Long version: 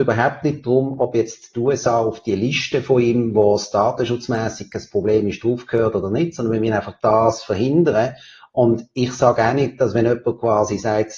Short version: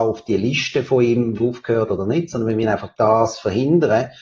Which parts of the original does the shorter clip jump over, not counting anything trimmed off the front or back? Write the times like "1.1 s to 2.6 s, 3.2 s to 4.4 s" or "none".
3.3 s to 5.4 s